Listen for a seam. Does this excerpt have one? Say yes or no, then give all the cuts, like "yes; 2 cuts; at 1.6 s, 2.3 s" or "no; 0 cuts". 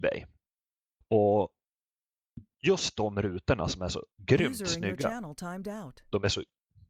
yes; 2 cuts; at 1.0 s, 4.1 s